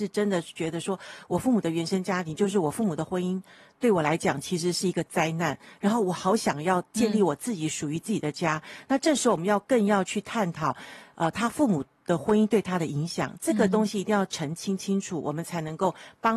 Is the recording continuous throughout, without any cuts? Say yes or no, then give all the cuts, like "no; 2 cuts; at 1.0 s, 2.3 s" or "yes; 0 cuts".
yes; 0 cuts